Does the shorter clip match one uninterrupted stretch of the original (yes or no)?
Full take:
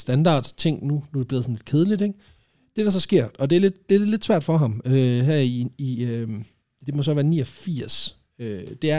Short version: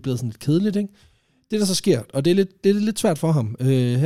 yes